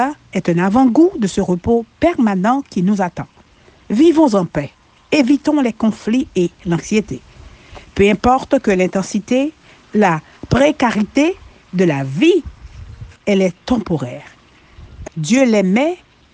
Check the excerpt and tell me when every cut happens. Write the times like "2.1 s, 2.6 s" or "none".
9.7 s, 13.1 s, 15.0 s